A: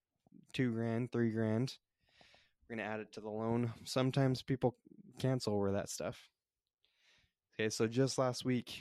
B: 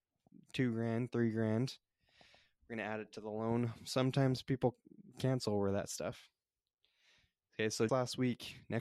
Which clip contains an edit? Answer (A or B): B